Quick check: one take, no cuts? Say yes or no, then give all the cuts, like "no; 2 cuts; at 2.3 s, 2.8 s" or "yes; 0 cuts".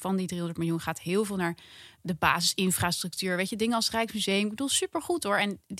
yes; 0 cuts